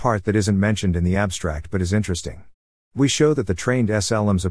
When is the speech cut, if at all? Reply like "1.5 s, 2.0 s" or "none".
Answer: none